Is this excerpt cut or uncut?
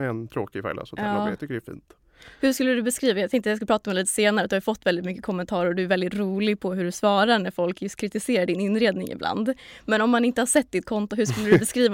uncut